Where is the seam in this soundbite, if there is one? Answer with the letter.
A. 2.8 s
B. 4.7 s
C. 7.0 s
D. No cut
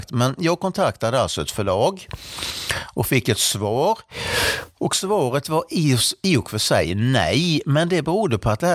D